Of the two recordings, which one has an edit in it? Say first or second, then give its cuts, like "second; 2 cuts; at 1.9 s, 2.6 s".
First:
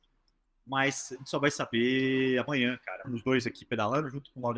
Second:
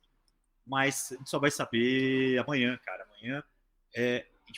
first; 1 cut; at 3.0 s